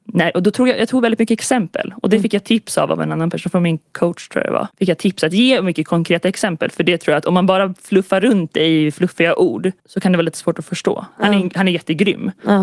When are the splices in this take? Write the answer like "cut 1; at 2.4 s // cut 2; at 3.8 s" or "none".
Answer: cut 1; at 4.7 s // cut 2; at 9.8 s // cut 3; at 11.1 s